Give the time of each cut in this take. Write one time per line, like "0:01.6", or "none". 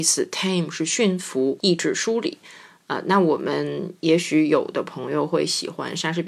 0:01.6